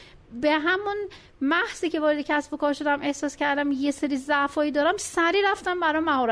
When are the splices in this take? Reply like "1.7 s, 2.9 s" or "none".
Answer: none